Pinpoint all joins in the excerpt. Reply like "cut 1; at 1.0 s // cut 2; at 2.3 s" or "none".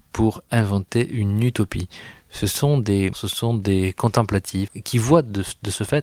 cut 1; at 3.1 s // cut 2; at 4.7 s

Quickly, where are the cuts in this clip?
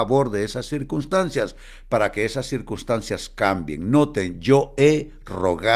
none

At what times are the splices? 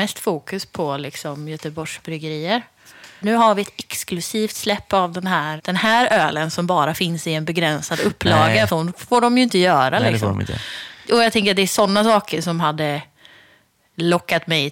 cut 1; at 3.2 s // cut 2; at 5.6 s // cut 3; at 8.7 s

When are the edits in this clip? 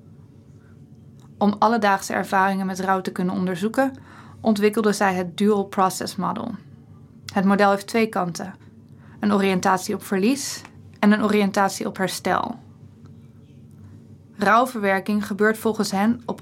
none

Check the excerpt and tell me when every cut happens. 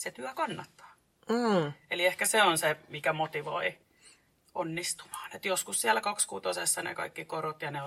none

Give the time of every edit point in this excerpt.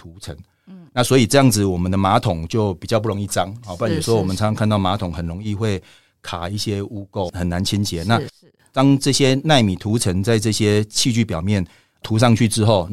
none

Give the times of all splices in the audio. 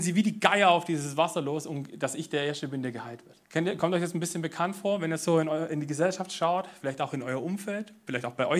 cut 1; at 3.4 s

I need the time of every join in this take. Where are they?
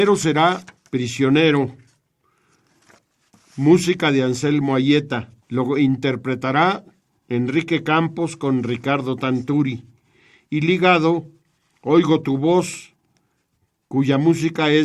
cut 1; at 5.4 s

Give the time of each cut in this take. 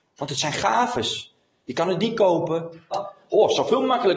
cut 1; at 2.9 s

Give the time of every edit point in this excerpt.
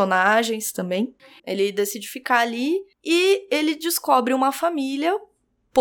cut 1; at 1.4 s // cut 2; at 2.9 s

